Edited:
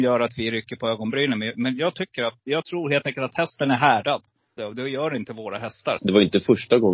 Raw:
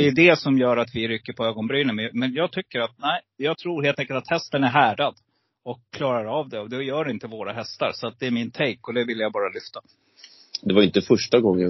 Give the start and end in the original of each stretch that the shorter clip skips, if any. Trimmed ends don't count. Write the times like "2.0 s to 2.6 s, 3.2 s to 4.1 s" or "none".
3.0 s to 3.3 s, 5.5 s to 6.5 s, 7.9 s to 10.6 s